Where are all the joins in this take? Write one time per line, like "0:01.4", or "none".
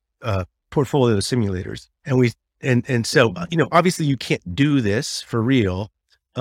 0:02.0